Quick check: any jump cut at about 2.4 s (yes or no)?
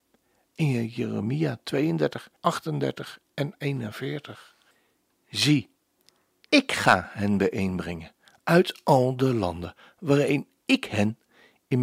yes